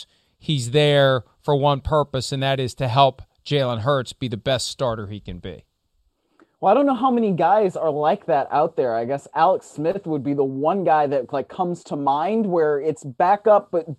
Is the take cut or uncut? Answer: uncut